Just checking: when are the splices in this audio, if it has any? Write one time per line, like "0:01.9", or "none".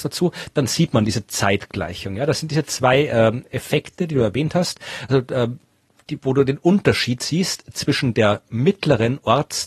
none

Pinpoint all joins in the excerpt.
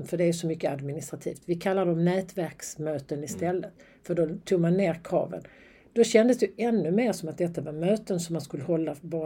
none

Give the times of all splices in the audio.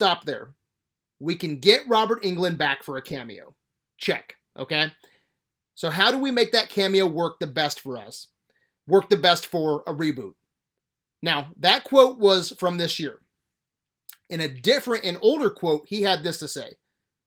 none

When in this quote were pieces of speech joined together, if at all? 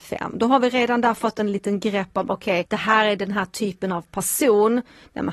0:02.6

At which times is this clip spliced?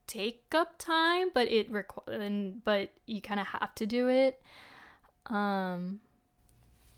none

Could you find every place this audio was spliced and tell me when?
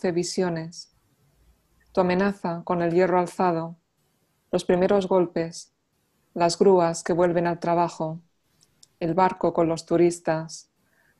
none

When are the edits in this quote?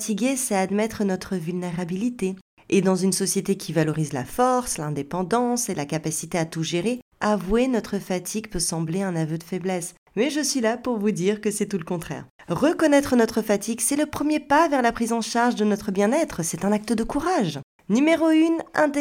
0:17.8

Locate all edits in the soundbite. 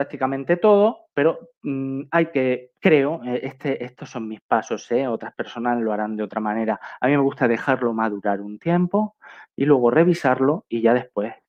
none

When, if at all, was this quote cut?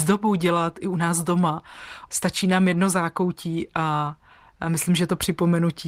0:02.1

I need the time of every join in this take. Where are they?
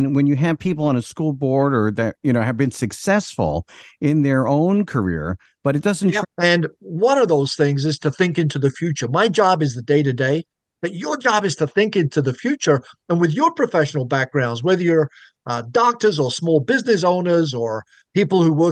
0:06.2

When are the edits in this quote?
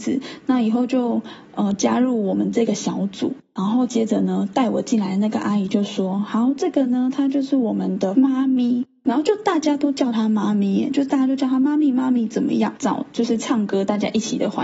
0:12.8

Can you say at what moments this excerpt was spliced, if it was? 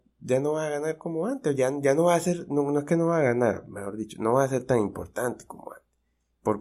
none

